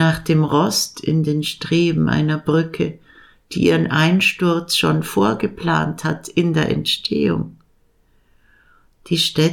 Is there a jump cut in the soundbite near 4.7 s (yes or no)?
no